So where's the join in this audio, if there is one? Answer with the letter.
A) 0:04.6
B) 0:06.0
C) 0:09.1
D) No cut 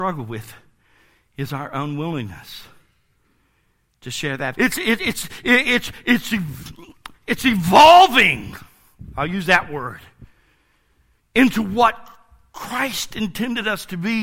A